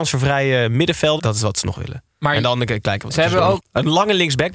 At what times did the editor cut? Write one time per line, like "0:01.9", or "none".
0:01.2
0:03.6